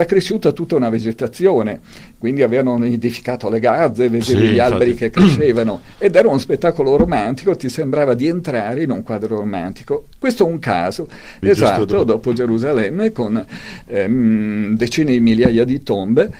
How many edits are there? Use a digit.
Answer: 2